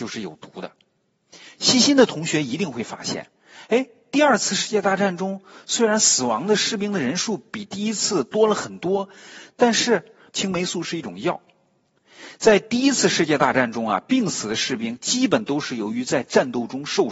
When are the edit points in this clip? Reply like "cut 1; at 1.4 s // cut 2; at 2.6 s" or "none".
cut 1; at 1.6 s // cut 2; at 10.3 s